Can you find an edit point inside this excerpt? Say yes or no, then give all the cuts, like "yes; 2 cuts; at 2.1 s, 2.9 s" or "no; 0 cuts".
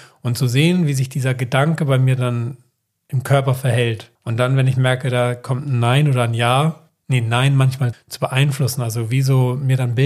yes; 3 cuts; at 4.2 s, 6.9 s, 7.9 s